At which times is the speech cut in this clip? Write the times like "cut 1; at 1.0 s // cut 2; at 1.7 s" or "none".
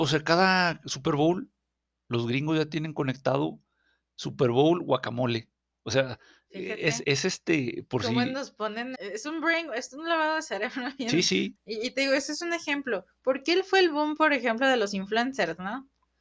cut 1; at 7.0 s // cut 2; at 8.9 s // cut 3; at 11.5 s